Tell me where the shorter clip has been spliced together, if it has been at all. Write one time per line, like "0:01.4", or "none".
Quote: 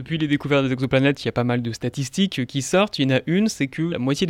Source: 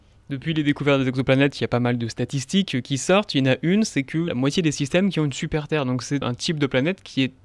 none